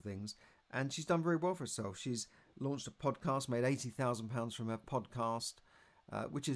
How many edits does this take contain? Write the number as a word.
zero